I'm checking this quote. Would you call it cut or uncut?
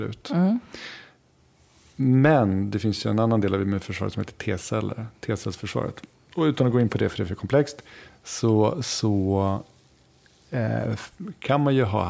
uncut